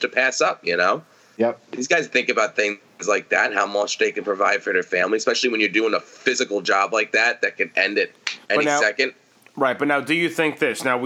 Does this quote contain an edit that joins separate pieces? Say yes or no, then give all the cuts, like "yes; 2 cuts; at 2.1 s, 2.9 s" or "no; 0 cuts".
yes; 1 cut; at 8.4 s